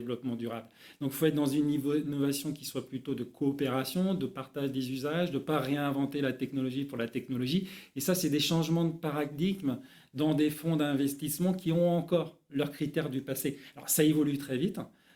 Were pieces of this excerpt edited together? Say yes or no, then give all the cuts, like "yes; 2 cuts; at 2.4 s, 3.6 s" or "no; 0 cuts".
no; 0 cuts